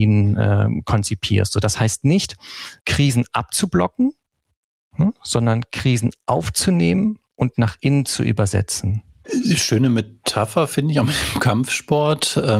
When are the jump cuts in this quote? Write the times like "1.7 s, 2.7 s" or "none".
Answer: 2.8 s